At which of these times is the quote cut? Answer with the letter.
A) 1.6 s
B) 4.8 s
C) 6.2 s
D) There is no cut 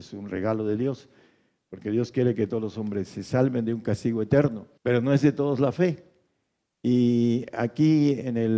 B